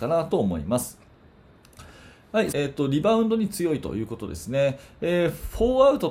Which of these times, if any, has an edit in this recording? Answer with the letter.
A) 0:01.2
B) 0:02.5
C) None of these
B